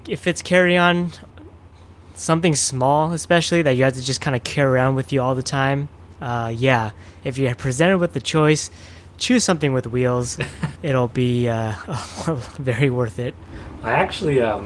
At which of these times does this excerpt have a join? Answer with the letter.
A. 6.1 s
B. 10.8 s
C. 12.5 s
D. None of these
B